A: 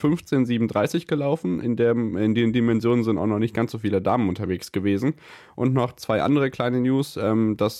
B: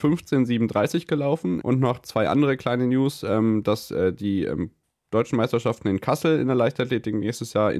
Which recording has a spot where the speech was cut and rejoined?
B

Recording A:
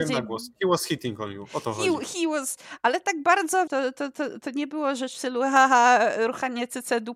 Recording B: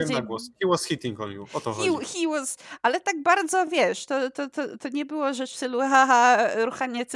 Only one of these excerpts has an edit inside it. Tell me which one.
A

